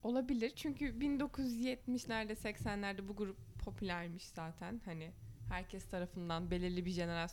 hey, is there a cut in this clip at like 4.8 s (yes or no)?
no